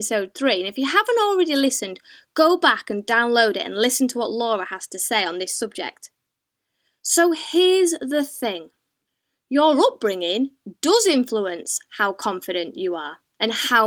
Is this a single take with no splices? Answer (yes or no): yes